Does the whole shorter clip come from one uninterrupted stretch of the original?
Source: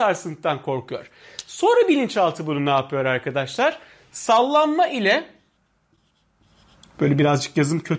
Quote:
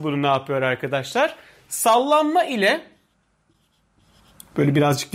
yes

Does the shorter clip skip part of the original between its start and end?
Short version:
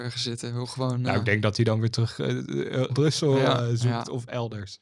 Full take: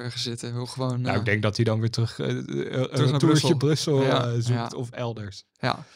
yes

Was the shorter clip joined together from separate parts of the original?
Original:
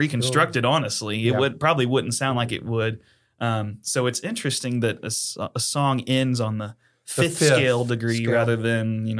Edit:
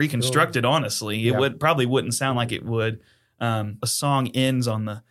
yes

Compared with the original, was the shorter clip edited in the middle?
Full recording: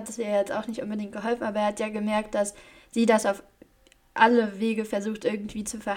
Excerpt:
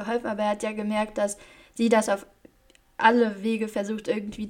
no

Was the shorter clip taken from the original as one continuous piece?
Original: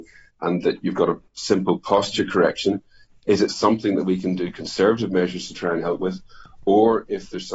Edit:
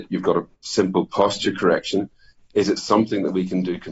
yes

